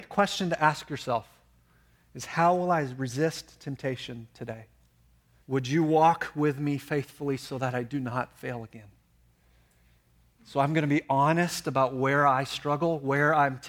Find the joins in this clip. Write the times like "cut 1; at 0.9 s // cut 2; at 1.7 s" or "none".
cut 1; at 5.4 s // cut 2; at 10.4 s